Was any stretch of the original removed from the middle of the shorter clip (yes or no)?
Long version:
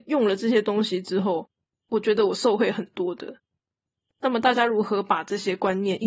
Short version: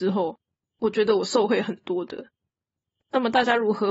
no